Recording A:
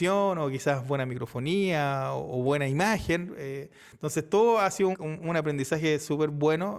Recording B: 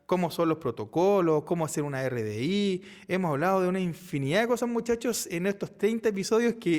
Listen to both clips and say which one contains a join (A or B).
A